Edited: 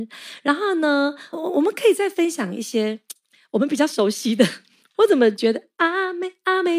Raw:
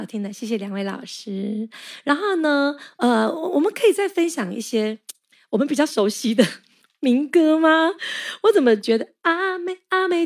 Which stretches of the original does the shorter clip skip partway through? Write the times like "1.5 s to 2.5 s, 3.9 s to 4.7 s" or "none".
2.9 s to 3.3 s, 6.9 s to 8.4 s

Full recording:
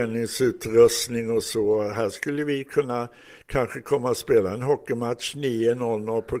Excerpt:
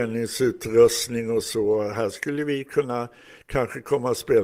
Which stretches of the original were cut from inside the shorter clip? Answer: none

